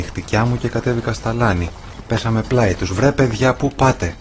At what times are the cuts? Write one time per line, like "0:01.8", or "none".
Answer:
none